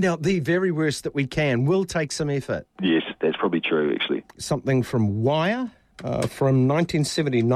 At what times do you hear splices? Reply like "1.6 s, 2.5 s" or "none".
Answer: 2.7 s, 4.3 s